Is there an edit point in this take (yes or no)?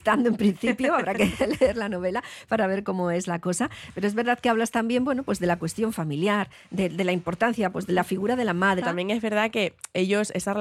yes